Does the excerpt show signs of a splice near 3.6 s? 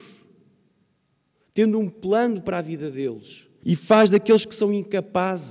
yes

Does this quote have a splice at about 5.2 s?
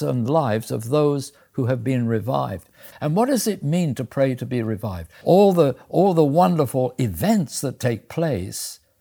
yes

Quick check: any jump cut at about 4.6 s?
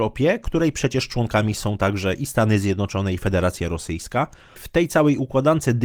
yes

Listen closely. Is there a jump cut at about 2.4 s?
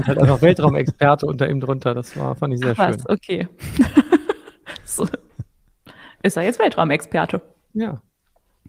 no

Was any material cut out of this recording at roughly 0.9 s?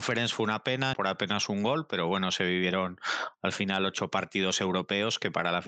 yes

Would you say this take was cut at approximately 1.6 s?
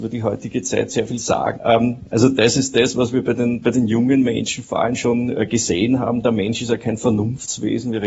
yes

